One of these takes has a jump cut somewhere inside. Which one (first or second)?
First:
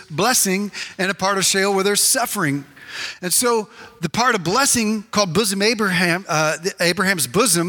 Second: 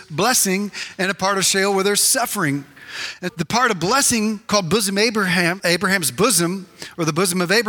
second